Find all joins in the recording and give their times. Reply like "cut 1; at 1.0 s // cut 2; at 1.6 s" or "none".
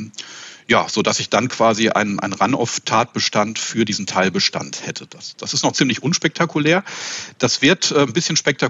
none